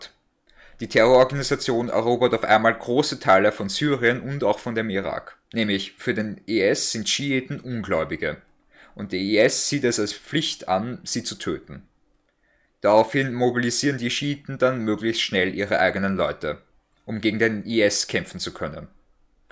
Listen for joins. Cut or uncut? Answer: cut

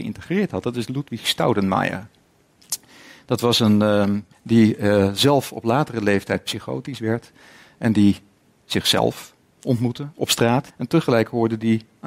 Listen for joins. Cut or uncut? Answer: cut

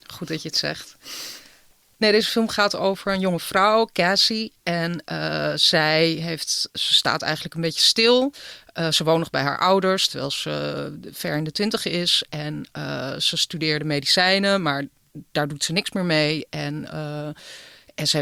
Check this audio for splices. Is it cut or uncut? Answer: uncut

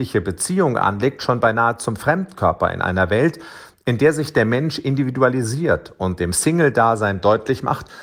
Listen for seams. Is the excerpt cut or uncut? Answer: uncut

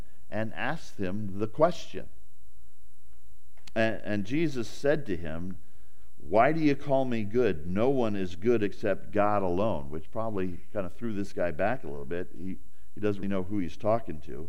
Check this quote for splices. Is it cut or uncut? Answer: cut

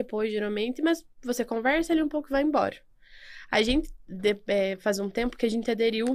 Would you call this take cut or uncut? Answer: uncut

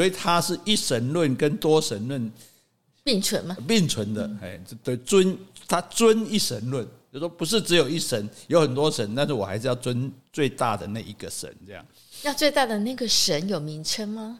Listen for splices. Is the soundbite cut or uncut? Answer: uncut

